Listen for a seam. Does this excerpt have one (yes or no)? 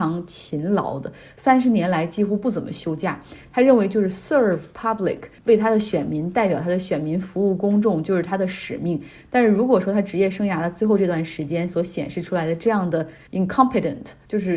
yes